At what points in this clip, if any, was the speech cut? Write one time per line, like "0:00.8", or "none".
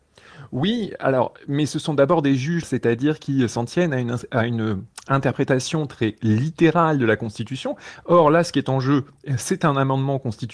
0:02.6